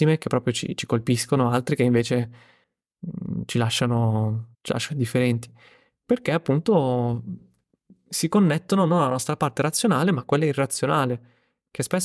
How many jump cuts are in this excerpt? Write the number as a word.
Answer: one